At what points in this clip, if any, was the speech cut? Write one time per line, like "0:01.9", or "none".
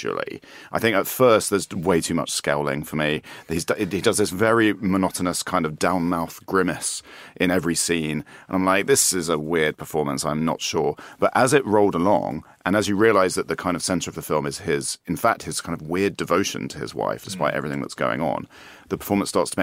none